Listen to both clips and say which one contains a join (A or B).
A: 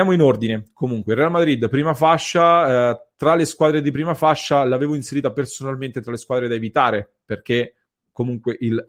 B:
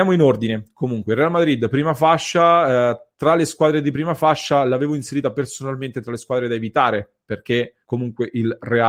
B